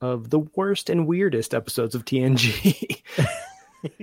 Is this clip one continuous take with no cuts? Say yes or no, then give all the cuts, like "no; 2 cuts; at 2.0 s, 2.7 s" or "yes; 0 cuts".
yes; 0 cuts